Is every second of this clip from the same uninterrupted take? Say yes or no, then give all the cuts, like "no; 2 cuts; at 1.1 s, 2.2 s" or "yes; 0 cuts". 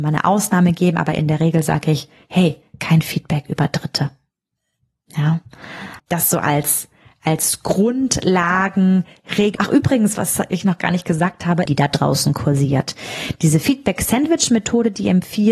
no; 3 cuts; at 6.0 s, 9.6 s, 11.7 s